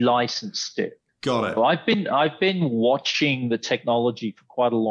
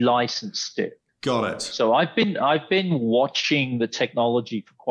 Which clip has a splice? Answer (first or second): first